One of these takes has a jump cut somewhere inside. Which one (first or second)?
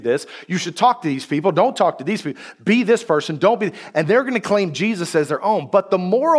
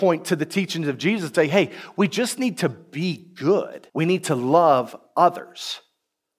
second